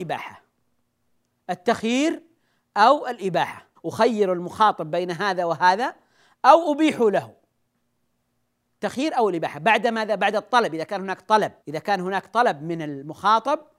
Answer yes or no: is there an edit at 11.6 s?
yes